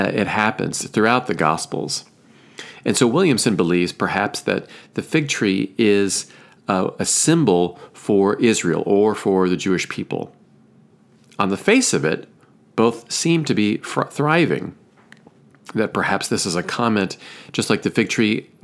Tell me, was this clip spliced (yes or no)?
no